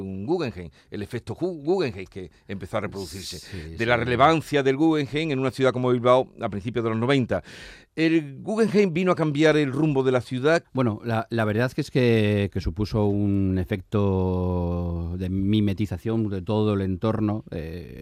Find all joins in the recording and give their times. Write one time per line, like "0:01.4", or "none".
0:10.6
0:12.5